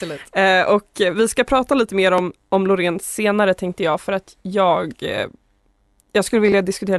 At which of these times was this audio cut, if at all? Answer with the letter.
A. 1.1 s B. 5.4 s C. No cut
C